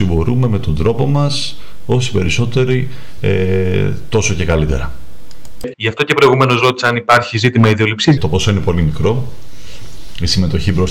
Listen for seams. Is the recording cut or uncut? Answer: cut